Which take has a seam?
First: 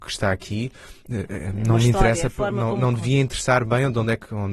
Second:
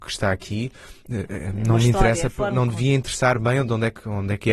second; 1 cut; at 2.5 s

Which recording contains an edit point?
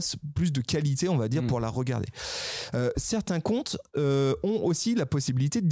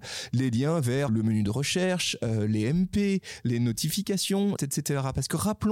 second; 2 cuts; at 1.1 s, 4.6 s

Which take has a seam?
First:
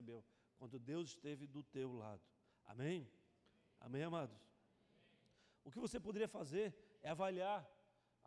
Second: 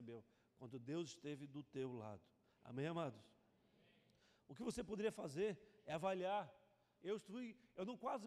second; 2 cuts; at 2.6 s, 7.0 s

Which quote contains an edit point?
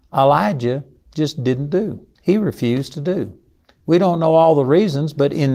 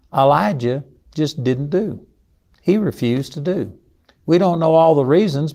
first; 1 cut; at 2.1 s

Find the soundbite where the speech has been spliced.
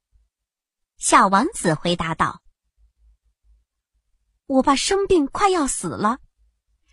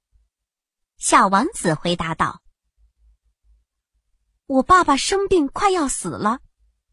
first; 1 cut; at 4.6 s

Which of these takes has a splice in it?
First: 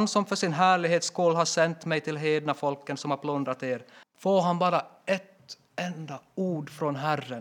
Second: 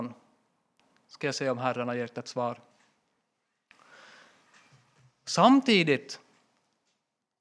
first; 1 cut; at 4.0 s

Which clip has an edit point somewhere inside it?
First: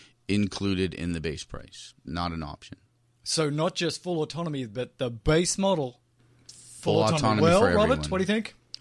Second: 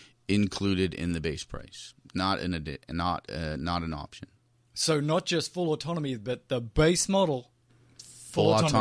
first; 1 cut; at 2.1 s

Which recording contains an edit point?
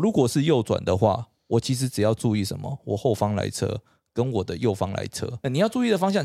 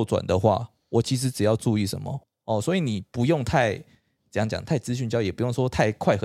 second; 1 cut; at 2.2 s

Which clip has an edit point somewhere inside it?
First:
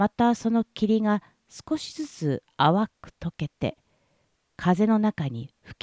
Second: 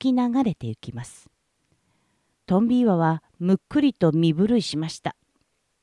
second; 1 cut; at 2.3 s

